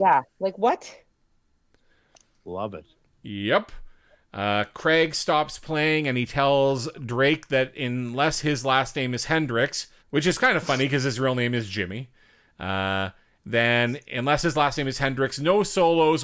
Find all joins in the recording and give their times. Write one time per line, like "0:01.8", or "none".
0:10.0